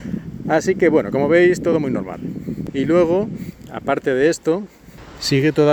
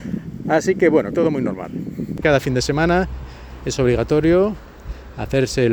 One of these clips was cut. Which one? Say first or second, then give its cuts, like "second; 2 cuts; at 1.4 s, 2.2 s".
second; 2 cuts; at 1.1 s, 2.2 s